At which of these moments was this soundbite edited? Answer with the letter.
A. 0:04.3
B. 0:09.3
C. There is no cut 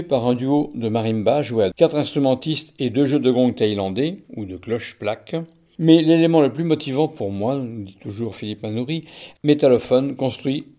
B